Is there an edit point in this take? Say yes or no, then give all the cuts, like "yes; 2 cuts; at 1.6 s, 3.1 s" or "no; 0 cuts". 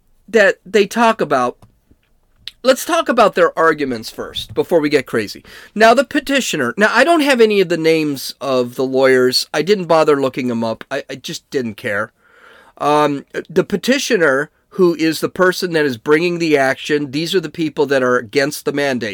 yes; 1 cut; at 2.6 s